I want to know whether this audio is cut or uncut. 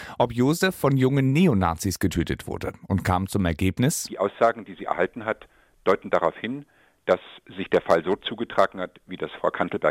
uncut